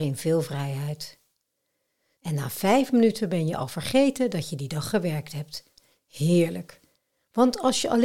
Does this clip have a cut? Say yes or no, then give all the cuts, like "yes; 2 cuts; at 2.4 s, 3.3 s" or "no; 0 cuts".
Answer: yes; 1 cut; at 2.2 s